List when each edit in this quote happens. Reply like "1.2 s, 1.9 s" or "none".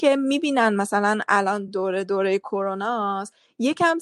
none